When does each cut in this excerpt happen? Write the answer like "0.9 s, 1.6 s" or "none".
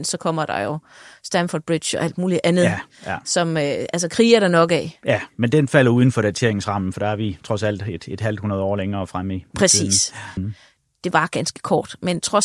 10.4 s